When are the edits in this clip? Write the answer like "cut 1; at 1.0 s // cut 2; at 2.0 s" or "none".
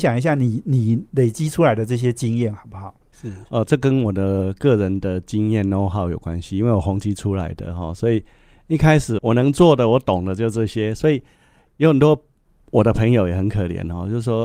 cut 1; at 3.1 s // cut 2; at 9.2 s